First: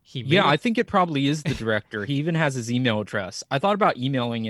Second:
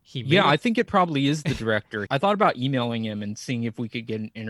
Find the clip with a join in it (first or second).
second